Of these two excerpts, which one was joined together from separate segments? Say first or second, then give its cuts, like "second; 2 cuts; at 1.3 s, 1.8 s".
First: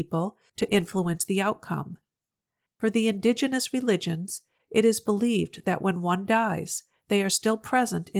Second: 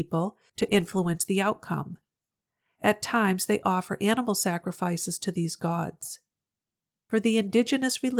first; 1 cut; at 2.7 s